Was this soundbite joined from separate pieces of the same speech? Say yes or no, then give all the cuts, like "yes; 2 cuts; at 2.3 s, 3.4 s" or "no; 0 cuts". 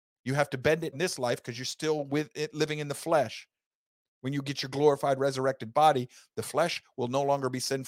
yes; 1 cut; at 0.9 s